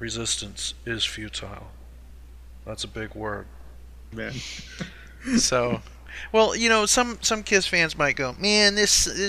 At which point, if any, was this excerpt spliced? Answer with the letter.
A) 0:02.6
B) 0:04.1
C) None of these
B